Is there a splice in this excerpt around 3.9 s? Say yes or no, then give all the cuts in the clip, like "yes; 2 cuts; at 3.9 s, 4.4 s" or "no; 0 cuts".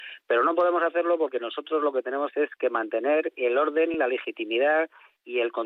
no; 0 cuts